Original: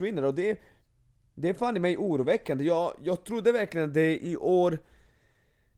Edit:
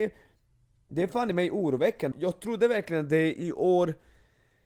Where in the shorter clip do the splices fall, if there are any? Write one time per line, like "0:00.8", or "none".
0:02.1